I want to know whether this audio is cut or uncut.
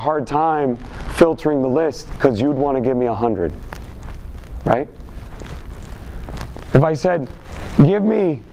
uncut